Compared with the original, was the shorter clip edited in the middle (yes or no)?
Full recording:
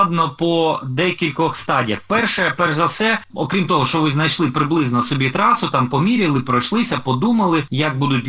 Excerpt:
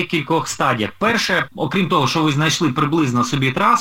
yes